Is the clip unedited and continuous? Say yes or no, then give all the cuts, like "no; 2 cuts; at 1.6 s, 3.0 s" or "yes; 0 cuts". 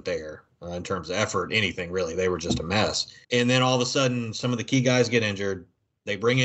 no; 1 cut; at 3.2 s